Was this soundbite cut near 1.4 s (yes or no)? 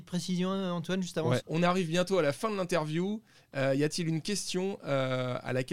yes